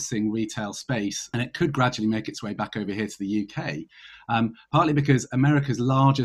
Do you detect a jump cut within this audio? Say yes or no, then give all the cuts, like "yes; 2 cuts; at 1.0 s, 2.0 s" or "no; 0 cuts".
no; 0 cuts